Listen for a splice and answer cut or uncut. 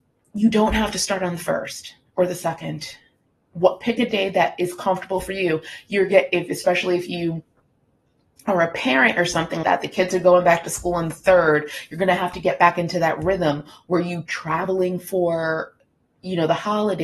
cut